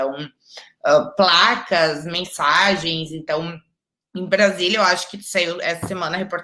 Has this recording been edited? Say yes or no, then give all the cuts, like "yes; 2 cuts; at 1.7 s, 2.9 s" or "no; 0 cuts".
no; 0 cuts